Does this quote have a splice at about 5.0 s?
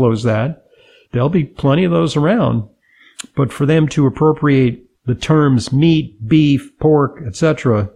yes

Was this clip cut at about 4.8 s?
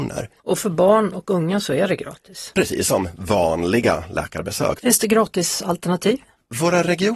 yes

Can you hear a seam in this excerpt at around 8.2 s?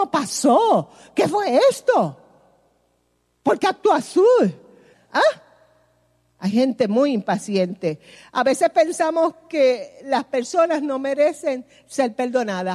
yes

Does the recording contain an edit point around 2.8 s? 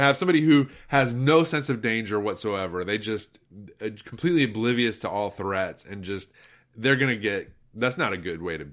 no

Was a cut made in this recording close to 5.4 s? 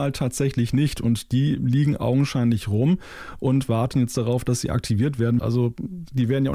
yes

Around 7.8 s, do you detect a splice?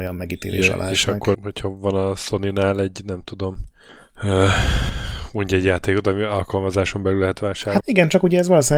yes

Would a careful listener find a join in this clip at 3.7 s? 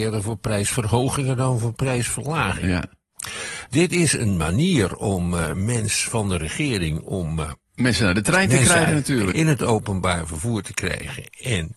yes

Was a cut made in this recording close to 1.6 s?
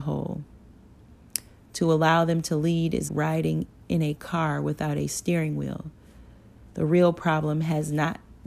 no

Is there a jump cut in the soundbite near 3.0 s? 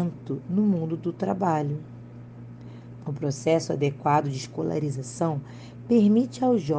yes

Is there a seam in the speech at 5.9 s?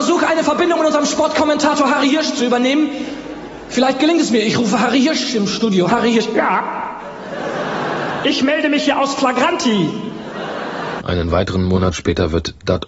yes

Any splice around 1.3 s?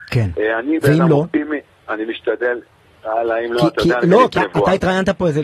no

